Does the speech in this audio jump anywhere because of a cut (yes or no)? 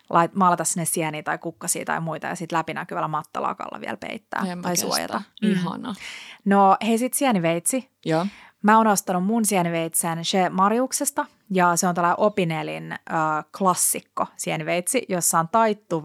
no